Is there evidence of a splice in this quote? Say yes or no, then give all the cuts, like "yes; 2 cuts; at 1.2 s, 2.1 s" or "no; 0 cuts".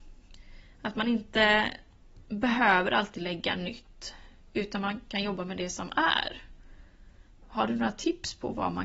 no; 0 cuts